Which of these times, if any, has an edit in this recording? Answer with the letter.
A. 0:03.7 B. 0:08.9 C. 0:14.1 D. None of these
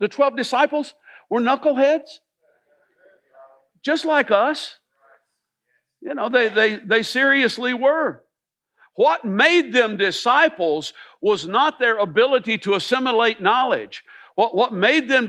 D